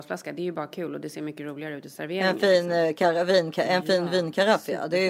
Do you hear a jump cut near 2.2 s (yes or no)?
no